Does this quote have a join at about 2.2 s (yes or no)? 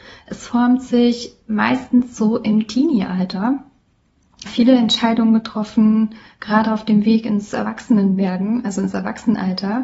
no